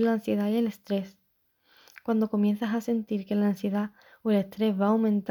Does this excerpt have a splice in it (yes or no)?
no